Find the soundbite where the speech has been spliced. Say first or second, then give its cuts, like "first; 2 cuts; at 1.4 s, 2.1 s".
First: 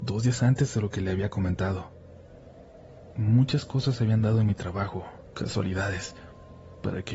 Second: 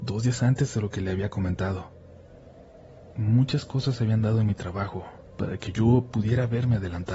second; 1 cut; at 5.3 s